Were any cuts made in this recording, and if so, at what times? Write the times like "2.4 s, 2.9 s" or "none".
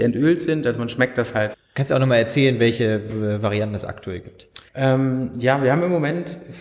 1.5 s, 4.7 s